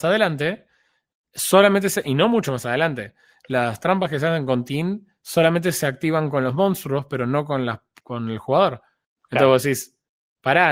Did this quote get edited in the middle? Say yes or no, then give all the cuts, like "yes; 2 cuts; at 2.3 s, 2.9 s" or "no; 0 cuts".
no; 0 cuts